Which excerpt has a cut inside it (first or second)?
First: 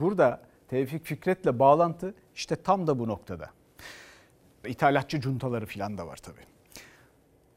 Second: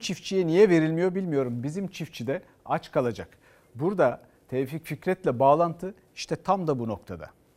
first